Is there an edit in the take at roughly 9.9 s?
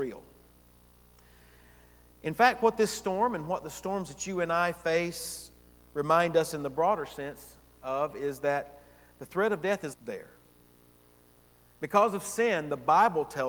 yes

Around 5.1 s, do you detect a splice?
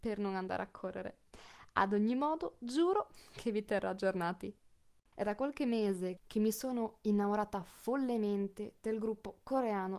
yes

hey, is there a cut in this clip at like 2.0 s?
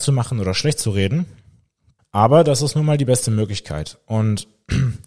yes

